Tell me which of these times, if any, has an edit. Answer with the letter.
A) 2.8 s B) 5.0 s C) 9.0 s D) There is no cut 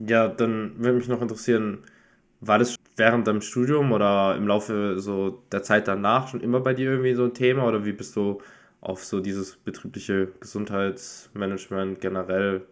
A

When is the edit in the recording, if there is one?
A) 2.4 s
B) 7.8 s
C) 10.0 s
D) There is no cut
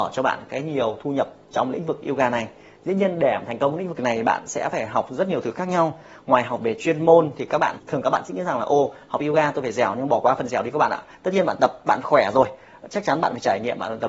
B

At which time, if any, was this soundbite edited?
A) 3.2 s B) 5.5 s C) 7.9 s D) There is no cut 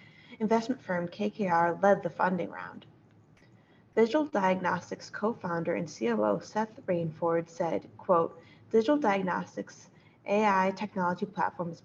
D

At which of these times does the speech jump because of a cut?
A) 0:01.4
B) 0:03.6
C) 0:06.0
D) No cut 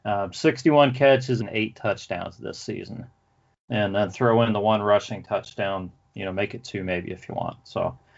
A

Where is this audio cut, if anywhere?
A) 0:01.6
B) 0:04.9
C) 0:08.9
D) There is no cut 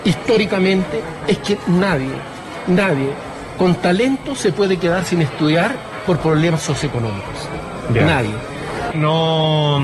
C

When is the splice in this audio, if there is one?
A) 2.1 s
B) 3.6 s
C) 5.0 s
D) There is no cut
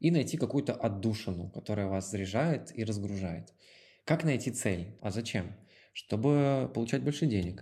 C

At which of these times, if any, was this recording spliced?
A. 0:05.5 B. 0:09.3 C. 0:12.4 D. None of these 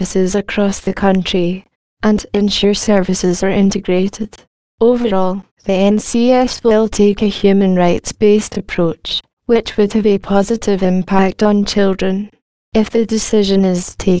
D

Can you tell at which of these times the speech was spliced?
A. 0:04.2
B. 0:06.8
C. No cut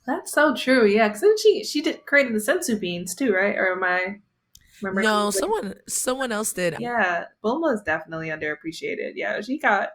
B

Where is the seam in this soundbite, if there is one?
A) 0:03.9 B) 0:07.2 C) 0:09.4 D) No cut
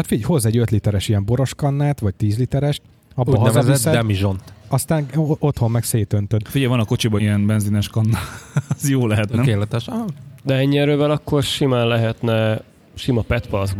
B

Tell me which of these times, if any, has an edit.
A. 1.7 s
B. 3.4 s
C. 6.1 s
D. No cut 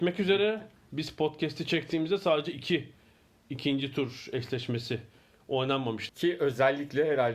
C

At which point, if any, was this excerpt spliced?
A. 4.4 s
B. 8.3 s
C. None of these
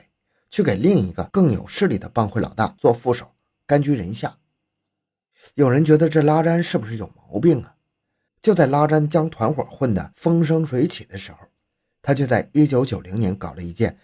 B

